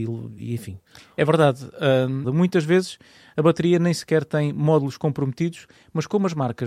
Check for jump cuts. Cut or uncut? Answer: cut